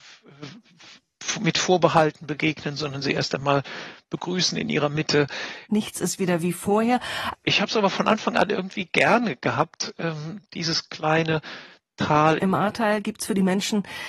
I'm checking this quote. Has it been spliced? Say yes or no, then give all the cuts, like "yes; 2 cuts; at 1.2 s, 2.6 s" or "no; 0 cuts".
yes; 3 cuts; at 5.7 s, 7.3 s, 12.4 s